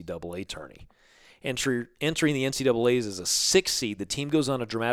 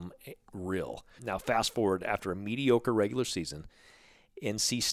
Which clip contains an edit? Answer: second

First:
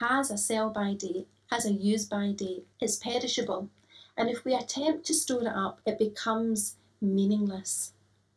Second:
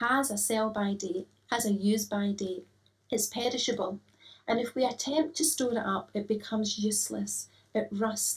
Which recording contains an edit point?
first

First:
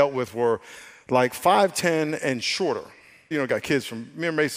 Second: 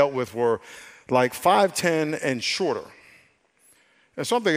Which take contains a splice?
first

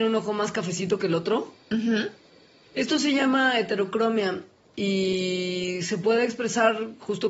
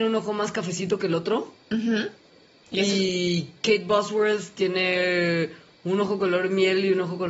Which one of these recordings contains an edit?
first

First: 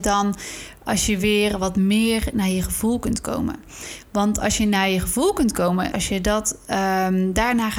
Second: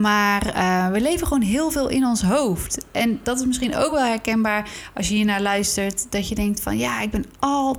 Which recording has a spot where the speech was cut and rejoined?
first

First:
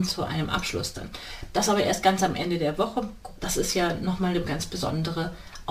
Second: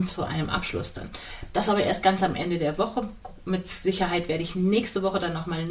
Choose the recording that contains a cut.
first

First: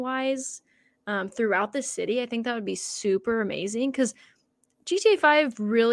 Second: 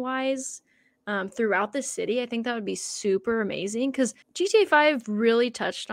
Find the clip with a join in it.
second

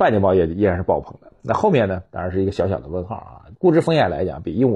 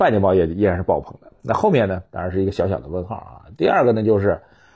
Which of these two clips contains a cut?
first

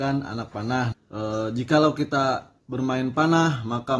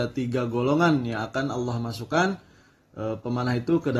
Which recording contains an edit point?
first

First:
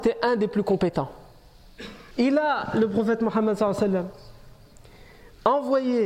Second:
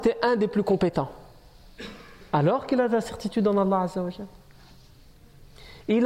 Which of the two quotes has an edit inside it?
first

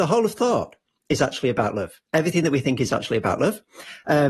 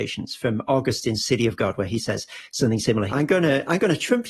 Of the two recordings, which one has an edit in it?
second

